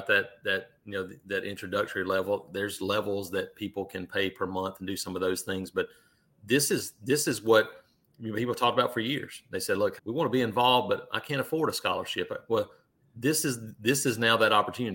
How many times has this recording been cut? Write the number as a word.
one